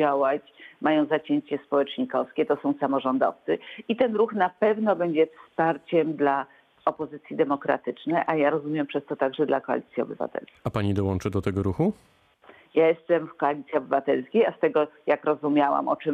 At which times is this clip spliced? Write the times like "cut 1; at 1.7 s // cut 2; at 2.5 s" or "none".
none